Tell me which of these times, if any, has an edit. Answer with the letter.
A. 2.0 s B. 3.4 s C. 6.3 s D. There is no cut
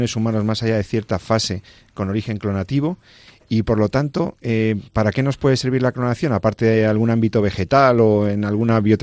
D